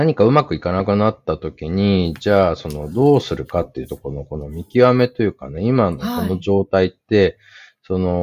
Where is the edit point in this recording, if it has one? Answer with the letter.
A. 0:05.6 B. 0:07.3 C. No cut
C